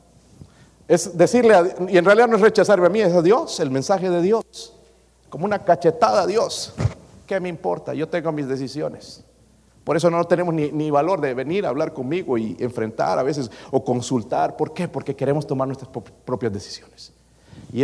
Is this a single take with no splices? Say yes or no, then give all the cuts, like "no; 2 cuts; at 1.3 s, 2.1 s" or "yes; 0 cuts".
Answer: yes; 0 cuts